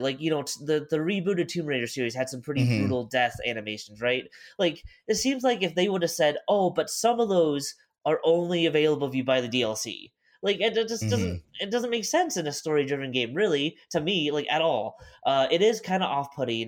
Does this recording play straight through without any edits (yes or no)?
yes